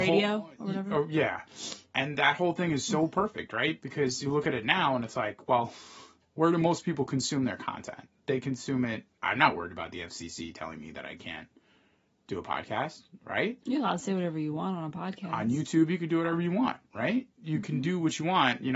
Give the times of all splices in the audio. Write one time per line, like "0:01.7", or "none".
0:09.2